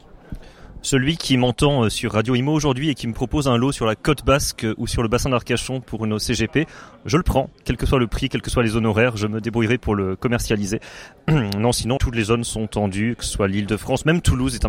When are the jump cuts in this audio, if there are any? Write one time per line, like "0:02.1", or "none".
0:12.0